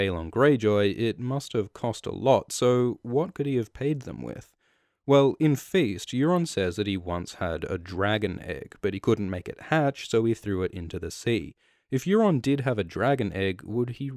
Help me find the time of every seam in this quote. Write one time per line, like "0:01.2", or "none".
none

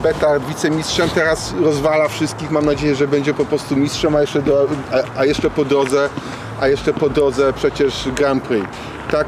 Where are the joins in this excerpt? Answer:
none

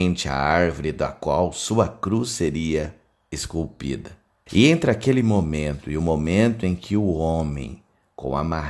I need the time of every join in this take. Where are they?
0:04.5

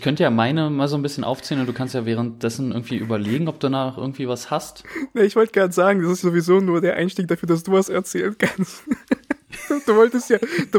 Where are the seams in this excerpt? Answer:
0:06.2

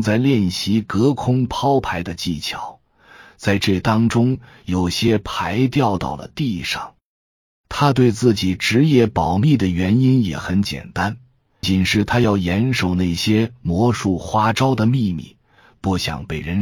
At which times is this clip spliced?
0:11.6

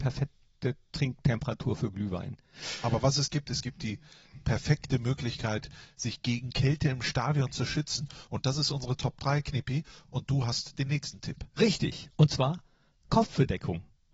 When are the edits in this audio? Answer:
none

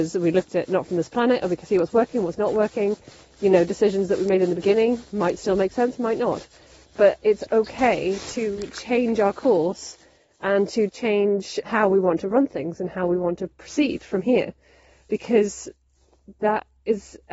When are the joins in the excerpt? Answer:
0:11.6

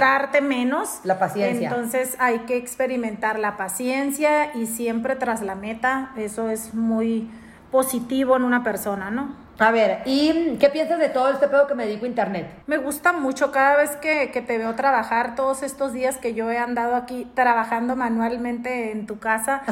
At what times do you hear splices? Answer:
0:12.6

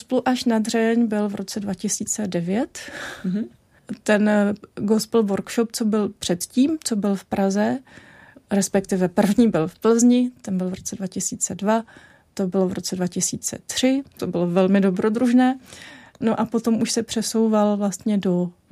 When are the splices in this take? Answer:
0:12.3
0:14.2

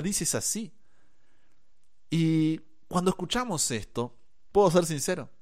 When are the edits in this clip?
none

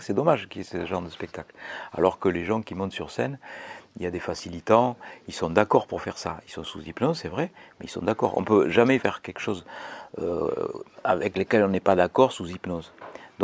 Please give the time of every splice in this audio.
0:09.0

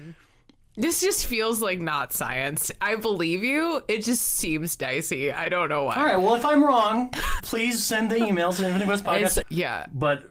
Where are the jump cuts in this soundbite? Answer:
0:07.4
0:09.4

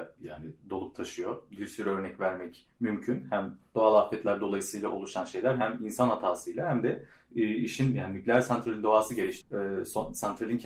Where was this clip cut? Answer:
0:09.4

